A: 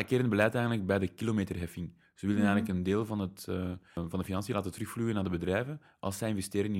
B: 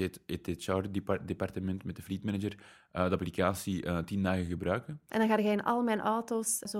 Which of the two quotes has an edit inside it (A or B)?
B